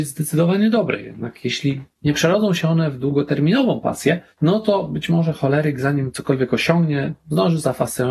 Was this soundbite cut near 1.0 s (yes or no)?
no